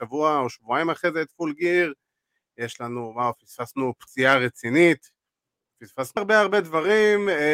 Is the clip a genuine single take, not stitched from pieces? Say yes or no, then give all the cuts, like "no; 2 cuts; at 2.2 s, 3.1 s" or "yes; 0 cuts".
no; 1 cut; at 6.2 s